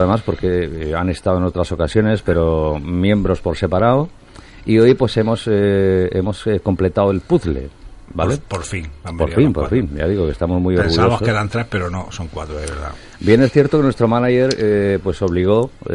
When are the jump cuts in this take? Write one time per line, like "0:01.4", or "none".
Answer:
none